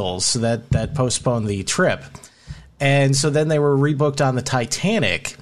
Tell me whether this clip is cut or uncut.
uncut